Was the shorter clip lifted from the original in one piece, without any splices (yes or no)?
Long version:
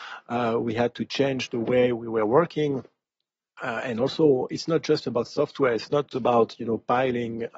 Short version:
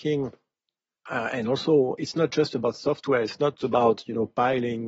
yes